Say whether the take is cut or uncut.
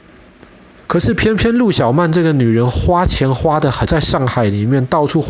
cut